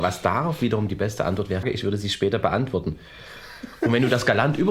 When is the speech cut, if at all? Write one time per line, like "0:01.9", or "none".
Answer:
0:01.6